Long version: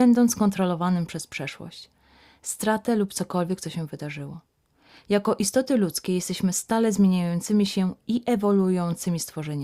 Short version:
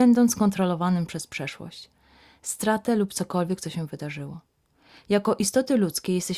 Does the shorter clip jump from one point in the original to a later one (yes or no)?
no